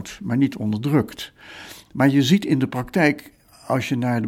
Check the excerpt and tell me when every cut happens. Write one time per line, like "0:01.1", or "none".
0:01.9